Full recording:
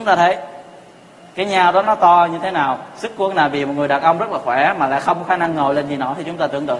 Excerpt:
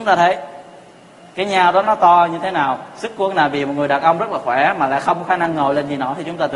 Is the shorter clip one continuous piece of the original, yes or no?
yes